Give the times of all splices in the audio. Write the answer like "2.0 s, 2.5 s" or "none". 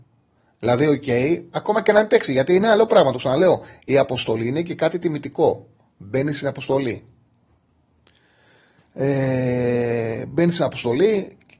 none